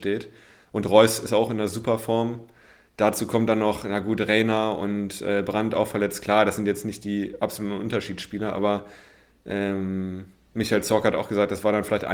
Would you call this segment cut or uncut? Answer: uncut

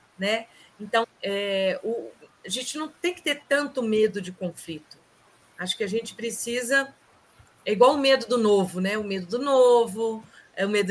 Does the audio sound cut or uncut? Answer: cut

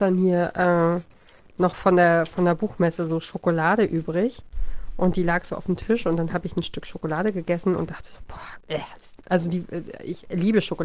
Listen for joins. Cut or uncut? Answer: uncut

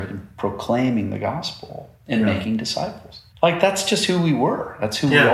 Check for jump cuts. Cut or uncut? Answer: cut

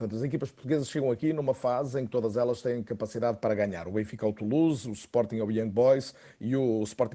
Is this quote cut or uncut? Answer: uncut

